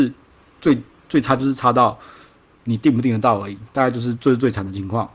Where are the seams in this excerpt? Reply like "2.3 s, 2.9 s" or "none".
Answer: none